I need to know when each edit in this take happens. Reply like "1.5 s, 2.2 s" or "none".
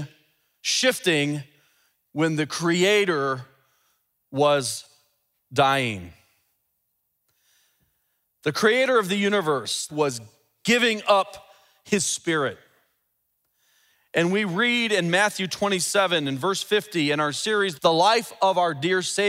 9.9 s, 17.8 s